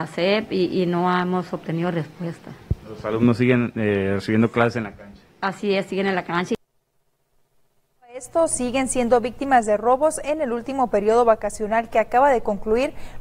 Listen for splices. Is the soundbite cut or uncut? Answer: uncut